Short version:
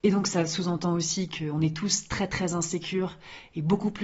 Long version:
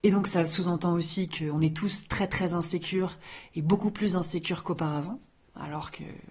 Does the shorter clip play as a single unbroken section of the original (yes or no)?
yes